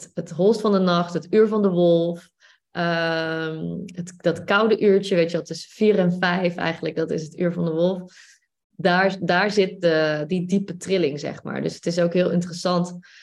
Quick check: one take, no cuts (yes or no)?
yes